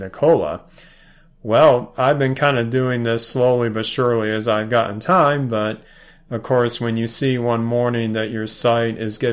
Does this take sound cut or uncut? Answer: uncut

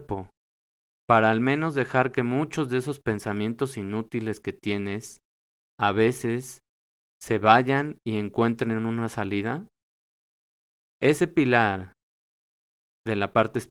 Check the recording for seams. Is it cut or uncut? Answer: uncut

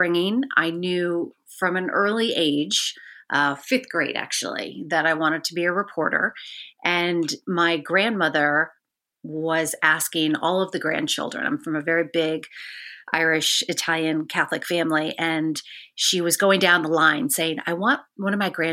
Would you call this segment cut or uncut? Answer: uncut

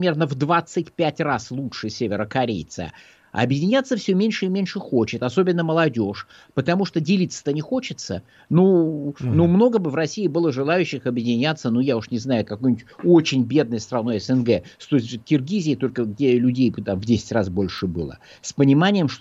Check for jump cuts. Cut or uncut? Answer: uncut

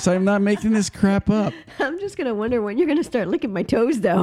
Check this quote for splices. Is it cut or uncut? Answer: uncut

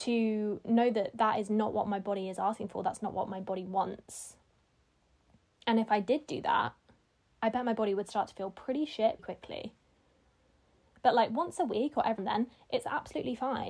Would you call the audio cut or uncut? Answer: cut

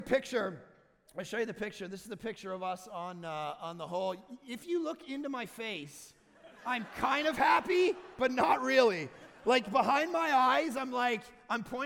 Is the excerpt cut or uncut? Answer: uncut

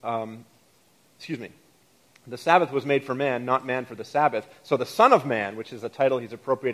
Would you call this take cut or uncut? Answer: uncut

